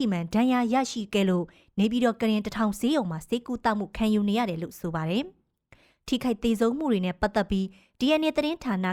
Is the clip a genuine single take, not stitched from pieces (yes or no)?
yes